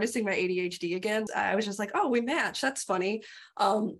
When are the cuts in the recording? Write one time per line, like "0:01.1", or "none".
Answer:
0:01.3